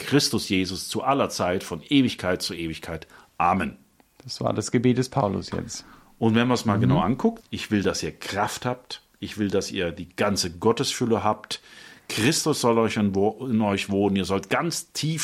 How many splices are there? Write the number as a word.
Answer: one